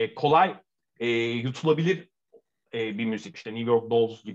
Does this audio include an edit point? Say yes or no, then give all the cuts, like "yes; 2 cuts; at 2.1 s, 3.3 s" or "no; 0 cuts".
yes; 1 cut; at 3.3 s